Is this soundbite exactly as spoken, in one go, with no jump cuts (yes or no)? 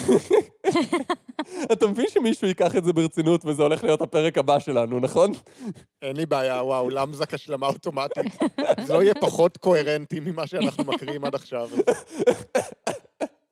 yes